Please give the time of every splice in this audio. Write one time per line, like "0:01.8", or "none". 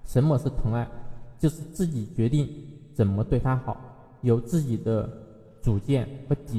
none